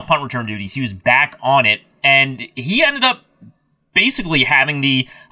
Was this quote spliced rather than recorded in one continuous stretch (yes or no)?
no